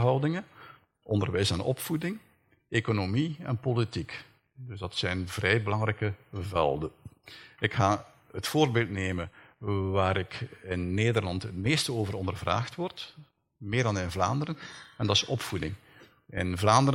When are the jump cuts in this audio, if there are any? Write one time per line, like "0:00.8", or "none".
none